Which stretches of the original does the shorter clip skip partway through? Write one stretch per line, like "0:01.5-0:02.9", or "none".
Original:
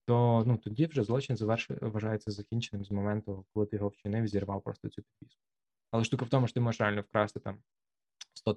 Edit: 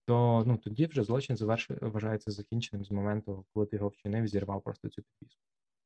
none